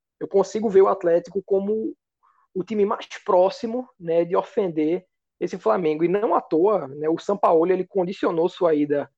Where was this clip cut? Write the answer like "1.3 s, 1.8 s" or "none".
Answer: none